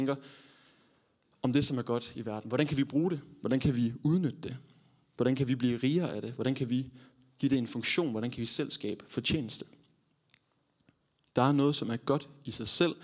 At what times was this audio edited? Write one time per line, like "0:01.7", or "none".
none